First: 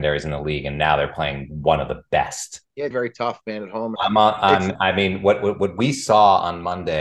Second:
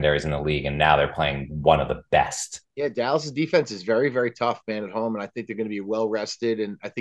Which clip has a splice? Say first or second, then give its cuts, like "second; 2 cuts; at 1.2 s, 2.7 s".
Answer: first; 2 cuts; at 2.9 s, 4.0 s